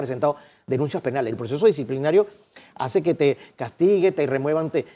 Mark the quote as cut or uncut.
cut